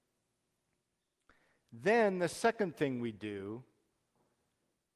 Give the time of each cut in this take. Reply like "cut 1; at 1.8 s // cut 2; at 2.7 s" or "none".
none